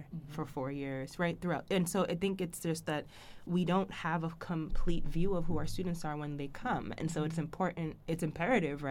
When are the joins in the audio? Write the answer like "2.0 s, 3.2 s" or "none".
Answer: none